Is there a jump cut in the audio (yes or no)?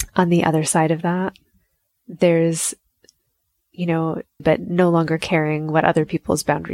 yes